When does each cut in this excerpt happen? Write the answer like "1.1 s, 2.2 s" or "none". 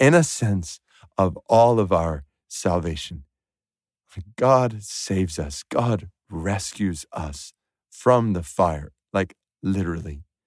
none